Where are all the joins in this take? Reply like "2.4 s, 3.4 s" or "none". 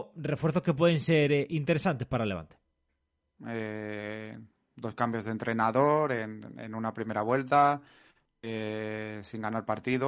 3.4 s